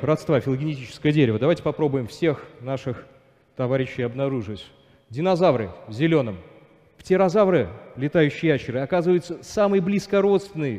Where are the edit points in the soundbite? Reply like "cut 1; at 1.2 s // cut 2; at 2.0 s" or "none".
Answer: none